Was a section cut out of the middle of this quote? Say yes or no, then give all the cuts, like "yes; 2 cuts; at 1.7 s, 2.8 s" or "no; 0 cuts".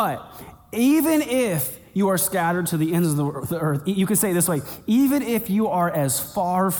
no; 0 cuts